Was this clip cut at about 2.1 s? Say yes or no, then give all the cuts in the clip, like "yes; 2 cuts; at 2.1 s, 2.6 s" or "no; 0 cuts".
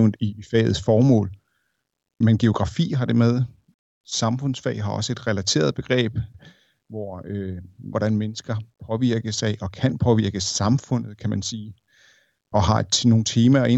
no; 2 cuts; at 4.0 s, 7.9 s